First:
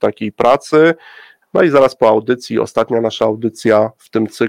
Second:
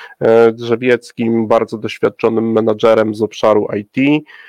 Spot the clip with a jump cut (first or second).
first